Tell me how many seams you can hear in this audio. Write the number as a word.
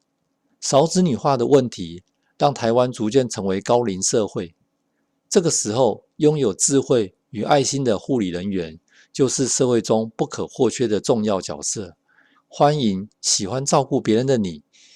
one